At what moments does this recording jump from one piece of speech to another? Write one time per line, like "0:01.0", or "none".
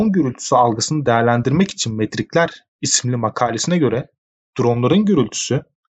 none